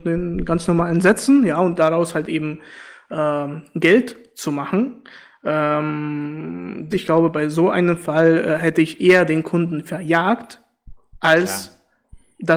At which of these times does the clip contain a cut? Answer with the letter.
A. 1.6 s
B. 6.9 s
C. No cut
B